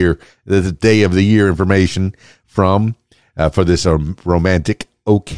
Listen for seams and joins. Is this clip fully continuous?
yes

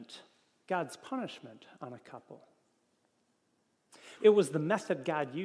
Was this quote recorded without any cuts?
no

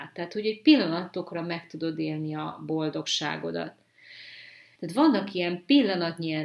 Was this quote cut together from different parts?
yes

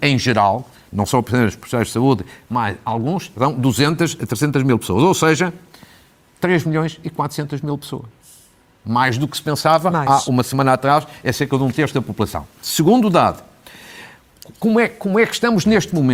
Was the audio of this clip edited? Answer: no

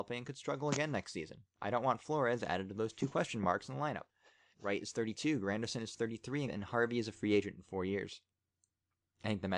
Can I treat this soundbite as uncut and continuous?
no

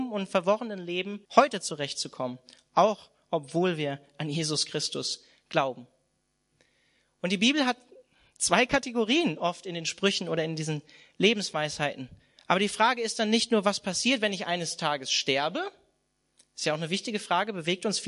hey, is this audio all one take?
no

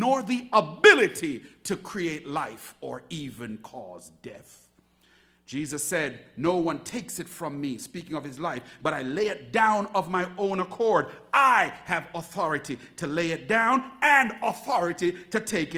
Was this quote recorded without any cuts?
yes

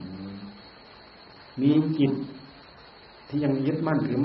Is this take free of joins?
yes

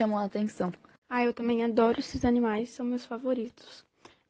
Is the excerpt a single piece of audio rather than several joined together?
yes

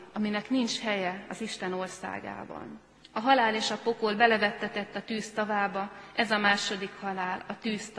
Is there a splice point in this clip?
yes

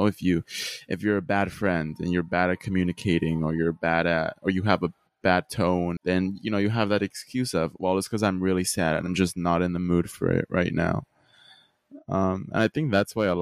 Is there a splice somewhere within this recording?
yes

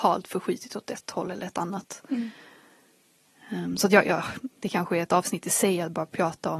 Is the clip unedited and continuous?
yes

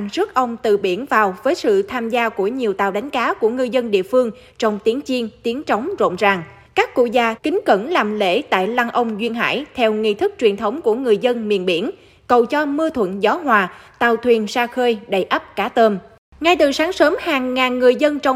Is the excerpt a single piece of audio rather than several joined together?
no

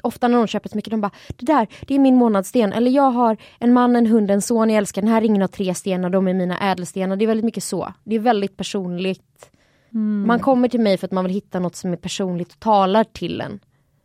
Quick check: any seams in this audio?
no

